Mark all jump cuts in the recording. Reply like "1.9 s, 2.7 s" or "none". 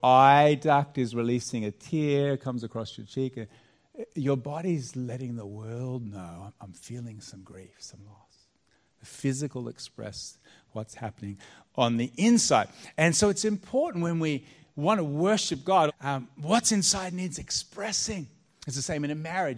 15.9 s